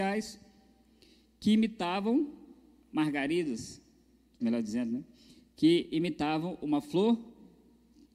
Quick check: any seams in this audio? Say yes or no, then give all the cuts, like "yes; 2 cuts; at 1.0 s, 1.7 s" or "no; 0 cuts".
yes; 1 cut; at 4.4 s